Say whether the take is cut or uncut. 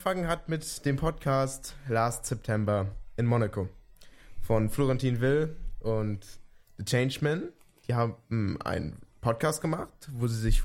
uncut